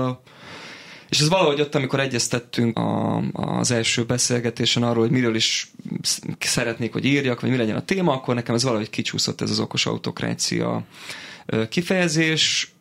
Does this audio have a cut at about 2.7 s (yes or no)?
yes